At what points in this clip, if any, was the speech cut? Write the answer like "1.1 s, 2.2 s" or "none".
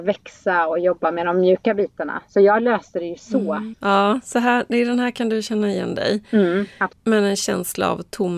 3.7 s, 6.9 s